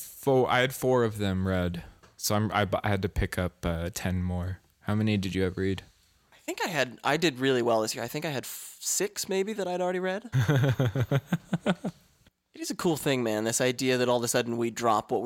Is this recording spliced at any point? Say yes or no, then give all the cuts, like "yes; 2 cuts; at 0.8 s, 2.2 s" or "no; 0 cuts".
yes; 1 cut; at 10.3 s